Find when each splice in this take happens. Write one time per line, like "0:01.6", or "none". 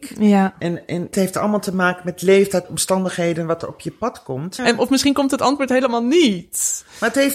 0:01.1
0:04.6